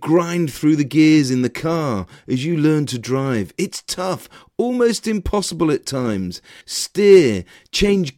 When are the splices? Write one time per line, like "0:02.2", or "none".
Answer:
0:06.6